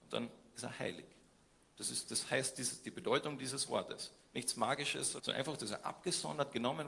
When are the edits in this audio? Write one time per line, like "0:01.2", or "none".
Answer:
0:05.2